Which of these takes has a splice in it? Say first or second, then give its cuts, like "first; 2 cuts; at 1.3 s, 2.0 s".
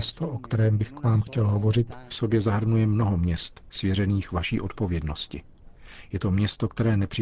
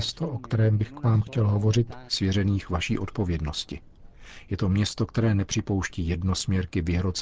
second; 1 cut; at 2.1 s